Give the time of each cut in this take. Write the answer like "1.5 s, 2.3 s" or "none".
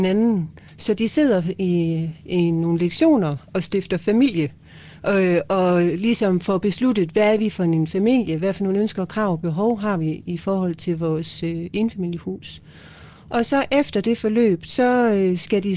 none

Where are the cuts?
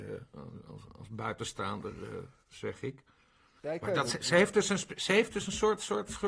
none

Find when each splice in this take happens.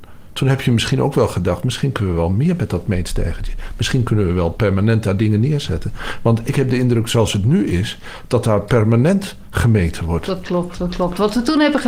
none

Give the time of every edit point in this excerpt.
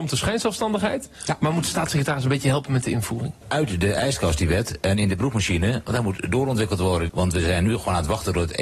3.4 s, 7.1 s

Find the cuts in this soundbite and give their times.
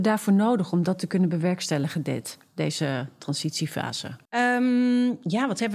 4.3 s

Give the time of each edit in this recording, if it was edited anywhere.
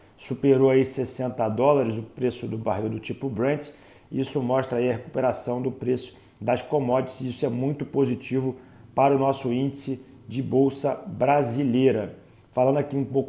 none

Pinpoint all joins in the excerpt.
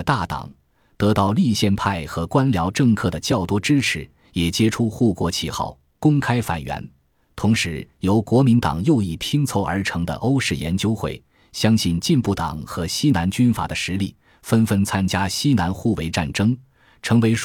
none

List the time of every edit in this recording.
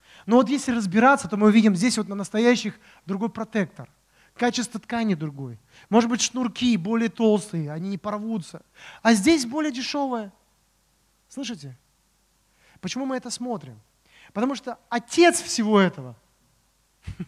none

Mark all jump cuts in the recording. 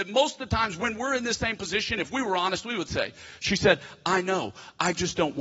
none

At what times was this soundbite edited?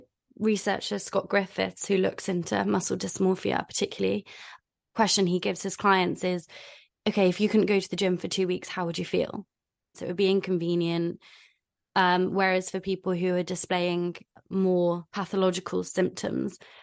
9.9 s, 15.1 s

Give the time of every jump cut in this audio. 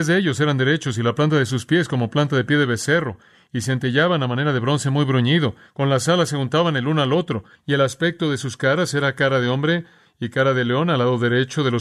5.7 s, 7.6 s

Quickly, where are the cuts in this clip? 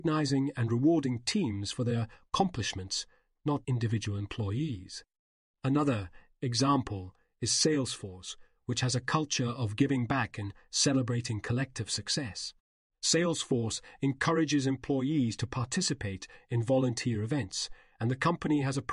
3.6 s, 5.5 s

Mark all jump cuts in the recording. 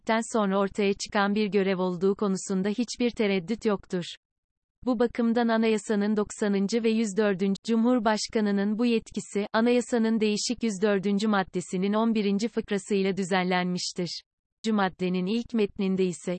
7.6 s, 14.6 s

